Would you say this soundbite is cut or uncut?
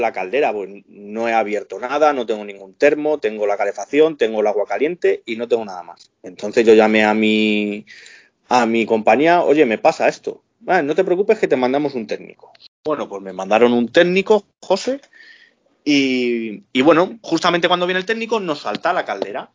uncut